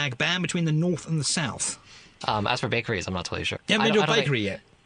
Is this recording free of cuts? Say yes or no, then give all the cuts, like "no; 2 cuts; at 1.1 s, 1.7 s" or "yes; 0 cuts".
no; 2 cuts; at 2.2 s, 3.6 s